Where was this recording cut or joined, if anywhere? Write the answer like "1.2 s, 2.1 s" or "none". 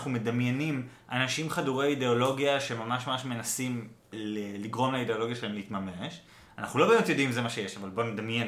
4.1 s